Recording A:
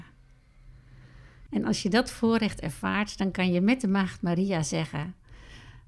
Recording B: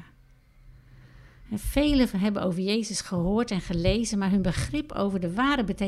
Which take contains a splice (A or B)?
A